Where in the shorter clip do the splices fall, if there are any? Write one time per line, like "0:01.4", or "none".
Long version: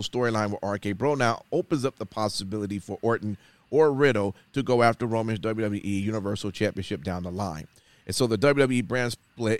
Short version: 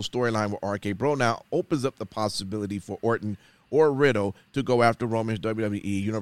none